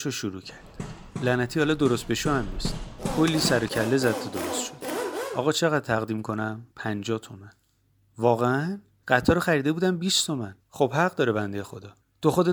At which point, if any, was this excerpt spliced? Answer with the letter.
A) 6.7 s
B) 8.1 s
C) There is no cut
A